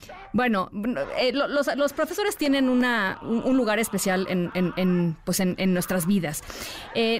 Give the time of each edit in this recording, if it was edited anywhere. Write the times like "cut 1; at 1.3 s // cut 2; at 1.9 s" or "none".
none